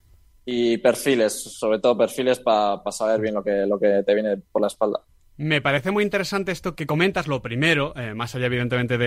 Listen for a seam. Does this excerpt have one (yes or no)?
yes